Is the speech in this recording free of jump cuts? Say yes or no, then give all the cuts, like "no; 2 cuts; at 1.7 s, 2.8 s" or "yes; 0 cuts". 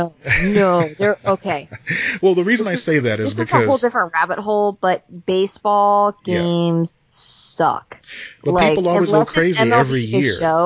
yes; 0 cuts